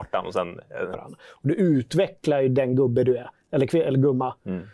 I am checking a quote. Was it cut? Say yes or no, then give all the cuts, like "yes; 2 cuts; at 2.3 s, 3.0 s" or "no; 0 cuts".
yes; 1 cut; at 0.9 s